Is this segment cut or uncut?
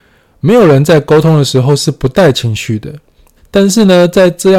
cut